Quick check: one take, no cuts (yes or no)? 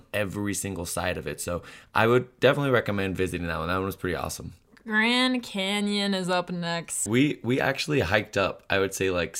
no